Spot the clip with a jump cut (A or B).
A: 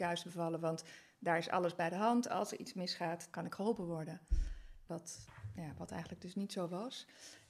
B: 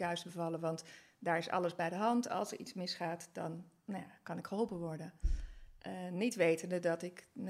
A